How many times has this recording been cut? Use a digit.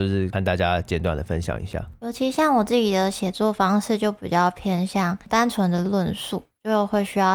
0